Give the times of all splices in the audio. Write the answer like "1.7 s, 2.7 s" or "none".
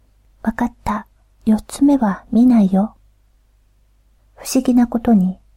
4.2 s